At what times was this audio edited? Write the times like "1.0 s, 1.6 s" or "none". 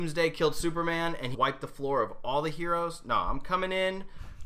1.3 s

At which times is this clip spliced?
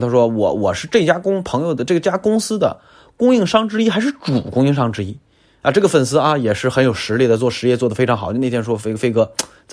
none

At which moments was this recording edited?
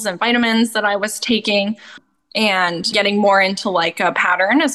2.9 s

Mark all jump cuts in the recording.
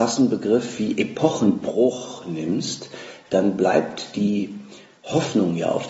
none

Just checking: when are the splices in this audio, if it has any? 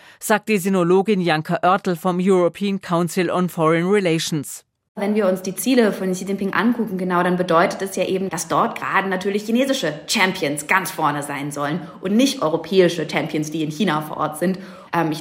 8.3 s, 12.1 s

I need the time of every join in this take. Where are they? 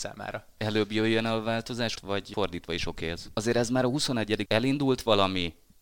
1.9 s, 3.3 s, 4.5 s

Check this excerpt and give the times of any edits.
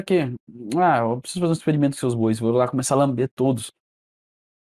none

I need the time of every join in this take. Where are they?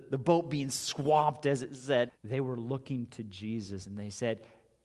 2.1 s

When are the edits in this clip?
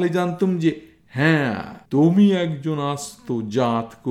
1.9 s

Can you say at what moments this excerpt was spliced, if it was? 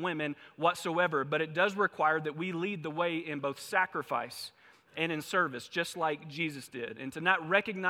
none

